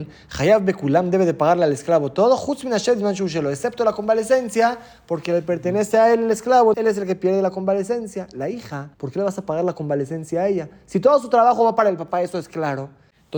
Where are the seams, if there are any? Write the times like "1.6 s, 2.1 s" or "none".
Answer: 6.7 s, 8.9 s